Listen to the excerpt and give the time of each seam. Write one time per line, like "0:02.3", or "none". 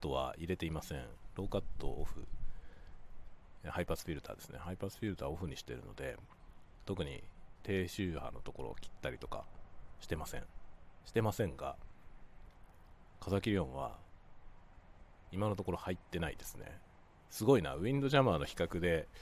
0:06.8